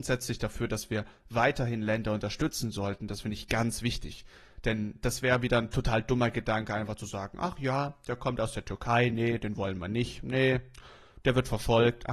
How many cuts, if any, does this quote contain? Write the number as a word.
zero